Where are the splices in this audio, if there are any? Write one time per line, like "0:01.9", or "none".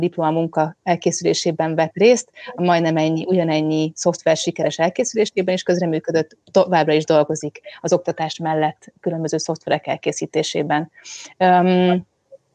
none